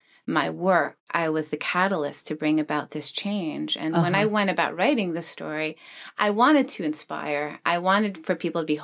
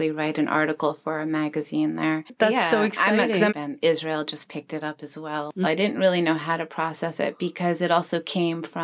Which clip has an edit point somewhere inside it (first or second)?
second